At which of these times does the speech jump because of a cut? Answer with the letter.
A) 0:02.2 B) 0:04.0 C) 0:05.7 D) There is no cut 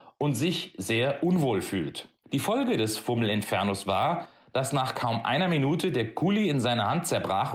A